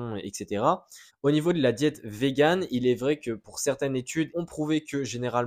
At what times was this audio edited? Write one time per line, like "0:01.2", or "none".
0:01.1
0:04.3